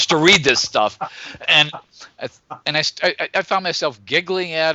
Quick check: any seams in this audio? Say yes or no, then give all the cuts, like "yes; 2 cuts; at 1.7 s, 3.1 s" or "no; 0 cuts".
no; 0 cuts